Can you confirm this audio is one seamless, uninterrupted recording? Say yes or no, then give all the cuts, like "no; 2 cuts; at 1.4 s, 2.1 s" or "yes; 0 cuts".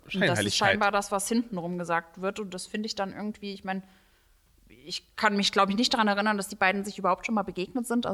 yes; 0 cuts